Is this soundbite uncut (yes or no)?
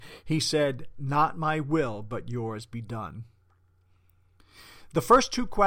yes